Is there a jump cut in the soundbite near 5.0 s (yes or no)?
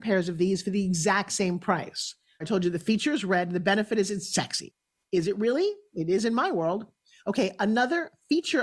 no